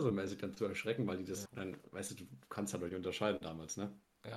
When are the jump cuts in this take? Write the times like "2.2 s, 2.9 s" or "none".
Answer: 1.5 s